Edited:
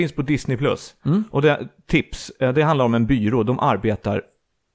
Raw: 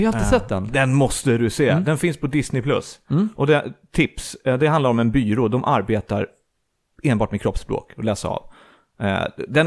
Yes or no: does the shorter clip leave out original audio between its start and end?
no